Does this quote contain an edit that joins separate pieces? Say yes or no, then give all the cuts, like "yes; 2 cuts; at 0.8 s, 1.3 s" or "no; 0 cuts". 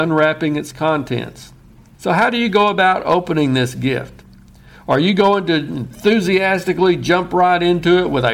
yes; 1 cut; at 1.9 s